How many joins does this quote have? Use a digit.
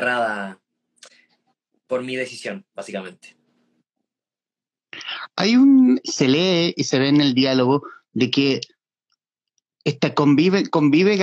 1